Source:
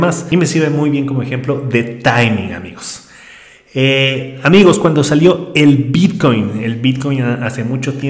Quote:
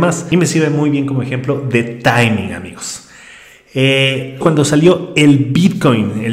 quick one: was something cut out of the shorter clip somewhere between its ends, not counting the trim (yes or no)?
yes